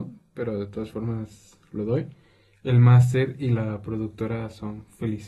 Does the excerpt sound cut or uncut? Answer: uncut